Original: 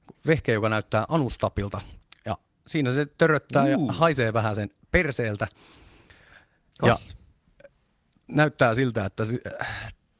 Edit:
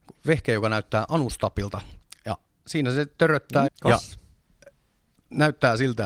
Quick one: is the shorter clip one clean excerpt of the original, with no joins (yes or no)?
no